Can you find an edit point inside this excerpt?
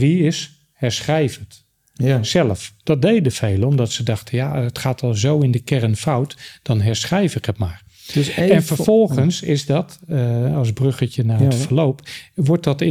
no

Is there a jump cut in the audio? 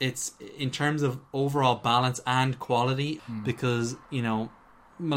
yes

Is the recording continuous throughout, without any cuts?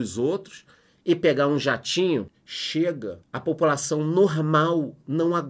no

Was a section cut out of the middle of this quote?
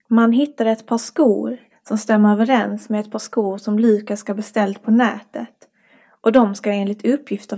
yes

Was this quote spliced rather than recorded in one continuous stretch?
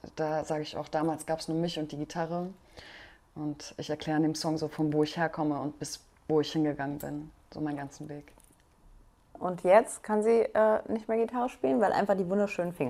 yes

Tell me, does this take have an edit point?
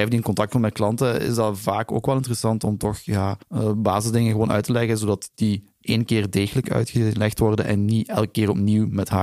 yes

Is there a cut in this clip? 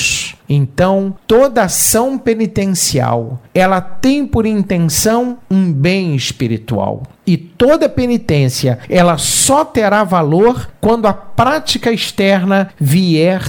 no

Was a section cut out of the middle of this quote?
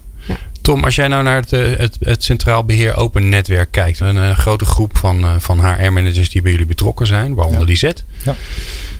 yes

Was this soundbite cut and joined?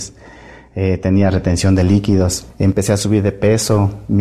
no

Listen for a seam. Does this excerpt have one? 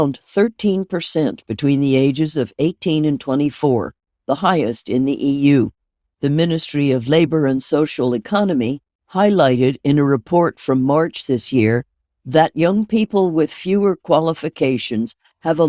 no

